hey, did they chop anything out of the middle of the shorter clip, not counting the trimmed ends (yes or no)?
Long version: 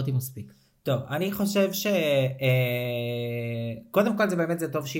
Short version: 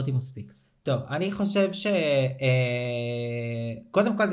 no